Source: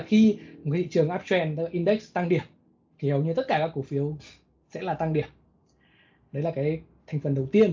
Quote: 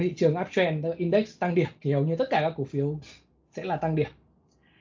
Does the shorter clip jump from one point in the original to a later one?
yes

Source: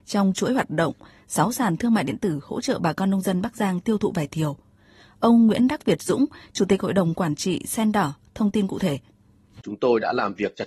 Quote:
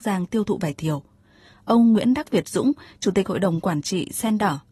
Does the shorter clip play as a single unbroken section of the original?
yes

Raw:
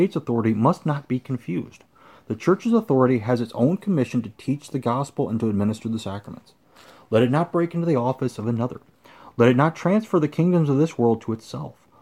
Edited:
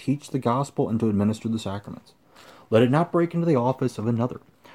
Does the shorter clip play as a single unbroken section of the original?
yes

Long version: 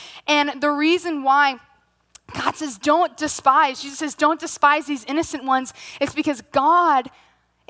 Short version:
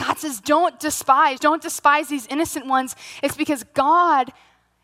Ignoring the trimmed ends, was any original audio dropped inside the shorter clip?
yes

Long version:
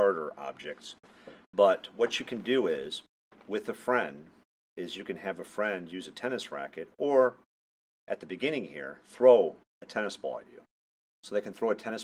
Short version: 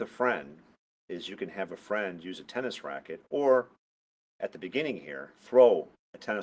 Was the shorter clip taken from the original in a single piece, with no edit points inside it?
yes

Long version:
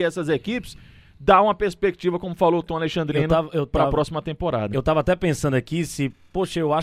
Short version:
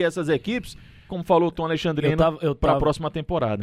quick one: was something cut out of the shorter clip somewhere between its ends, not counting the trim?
yes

